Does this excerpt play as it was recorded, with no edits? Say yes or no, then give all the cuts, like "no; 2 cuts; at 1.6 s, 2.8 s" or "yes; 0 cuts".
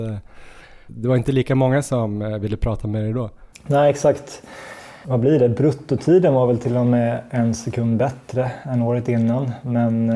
yes; 0 cuts